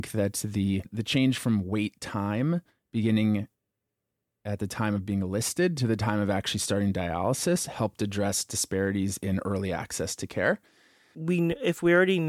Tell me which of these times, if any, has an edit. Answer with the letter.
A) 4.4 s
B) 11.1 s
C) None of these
B